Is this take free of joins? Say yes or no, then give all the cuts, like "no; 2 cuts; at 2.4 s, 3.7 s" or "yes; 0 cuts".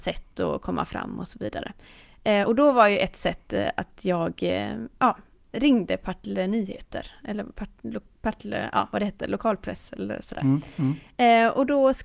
yes; 0 cuts